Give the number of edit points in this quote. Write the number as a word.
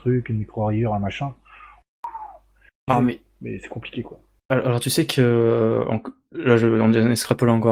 one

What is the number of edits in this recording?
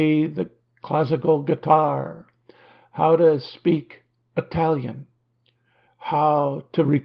one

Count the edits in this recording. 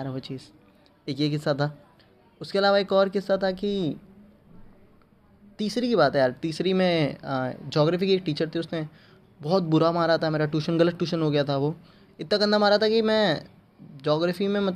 zero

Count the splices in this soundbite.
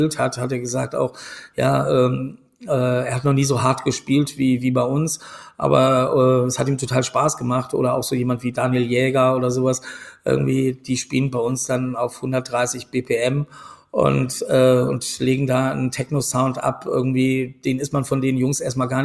zero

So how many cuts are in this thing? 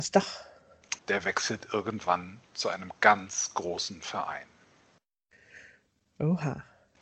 one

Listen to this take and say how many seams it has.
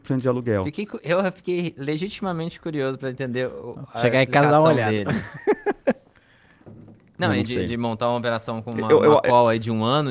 zero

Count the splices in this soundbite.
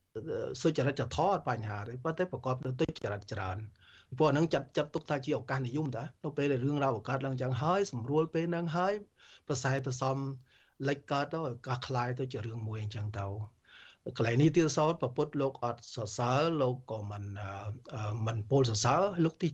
zero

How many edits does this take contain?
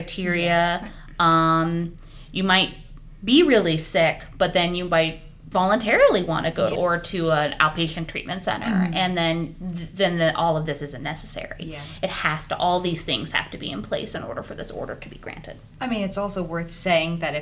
one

